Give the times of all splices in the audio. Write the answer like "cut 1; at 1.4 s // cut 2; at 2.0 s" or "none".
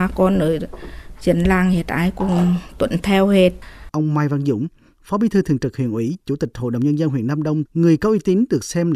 cut 1; at 3.9 s // cut 2; at 7.7 s